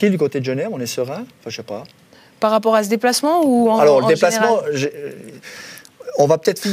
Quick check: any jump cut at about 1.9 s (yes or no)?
no